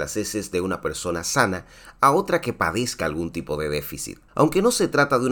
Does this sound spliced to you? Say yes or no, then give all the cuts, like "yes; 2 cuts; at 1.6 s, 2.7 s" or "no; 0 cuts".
yes; 1 cut; at 4.3 s